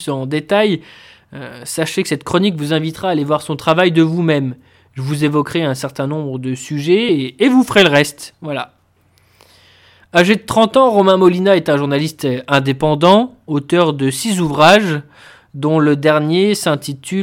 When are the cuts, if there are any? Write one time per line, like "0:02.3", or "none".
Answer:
none